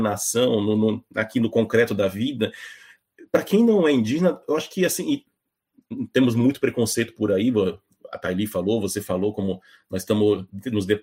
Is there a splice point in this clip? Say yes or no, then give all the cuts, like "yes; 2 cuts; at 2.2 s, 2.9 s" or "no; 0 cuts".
no; 0 cuts